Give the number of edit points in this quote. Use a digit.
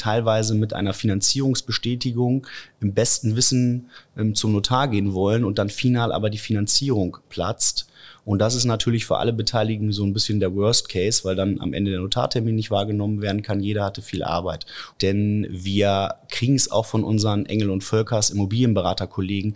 1